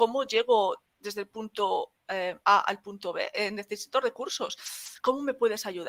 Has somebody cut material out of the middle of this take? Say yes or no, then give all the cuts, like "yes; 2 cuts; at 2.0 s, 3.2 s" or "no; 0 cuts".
no; 0 cuts